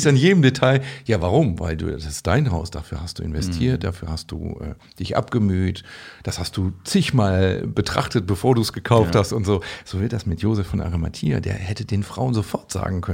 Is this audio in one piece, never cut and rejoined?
yes; 0 cuts

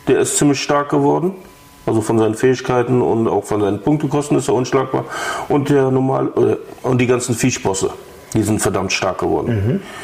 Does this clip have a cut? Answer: no; 0 cuts

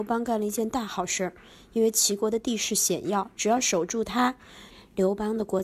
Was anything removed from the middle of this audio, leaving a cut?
no; 0 cuts

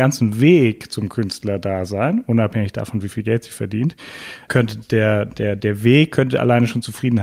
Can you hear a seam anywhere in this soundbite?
yes; 1 cut; at 4.5 s

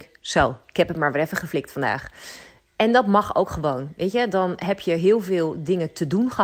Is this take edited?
no; 0 cuts

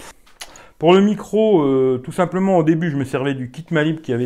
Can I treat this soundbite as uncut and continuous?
yes; 0 cuts

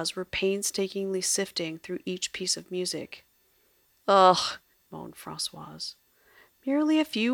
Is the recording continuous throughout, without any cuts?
no; 1 cut; at 4.7 s

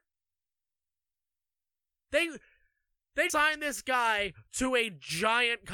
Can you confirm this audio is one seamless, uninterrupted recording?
no; 1 cut; at 3.3 s

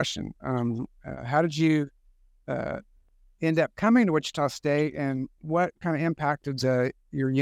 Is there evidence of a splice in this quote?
no; 0 cuts

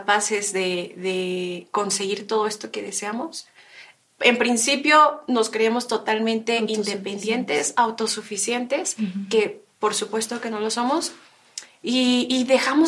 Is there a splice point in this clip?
no; 0 cuts

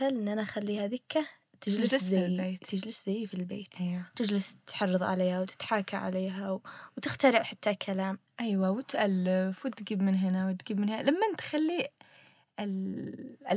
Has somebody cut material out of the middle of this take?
no; 0 cuts

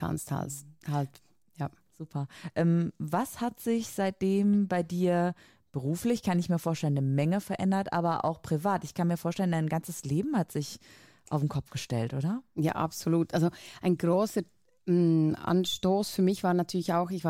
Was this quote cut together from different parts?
no; 0 cuts

